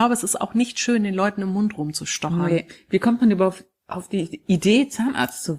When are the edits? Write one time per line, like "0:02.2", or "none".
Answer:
none